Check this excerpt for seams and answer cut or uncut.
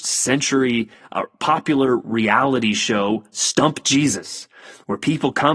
uncut